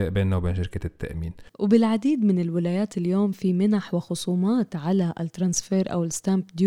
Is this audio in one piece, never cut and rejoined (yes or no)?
no